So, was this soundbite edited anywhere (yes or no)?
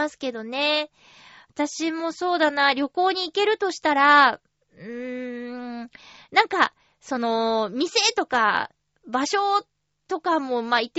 no